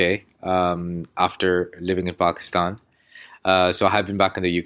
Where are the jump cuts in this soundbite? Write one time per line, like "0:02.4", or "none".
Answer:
none